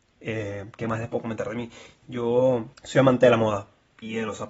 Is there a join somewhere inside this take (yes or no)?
yes